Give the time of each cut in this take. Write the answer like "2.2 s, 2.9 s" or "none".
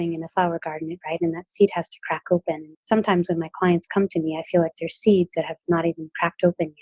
1.0 s